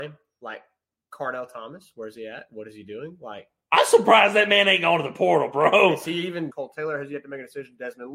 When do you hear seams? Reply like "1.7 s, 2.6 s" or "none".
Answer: 6.5 s